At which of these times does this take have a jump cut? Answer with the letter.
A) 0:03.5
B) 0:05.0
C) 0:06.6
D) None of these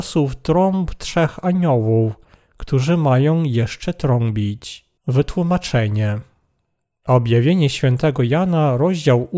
B